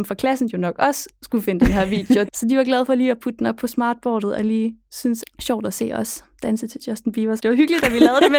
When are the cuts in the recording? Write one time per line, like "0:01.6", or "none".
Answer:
0:02.2
0:05.2
0:07.4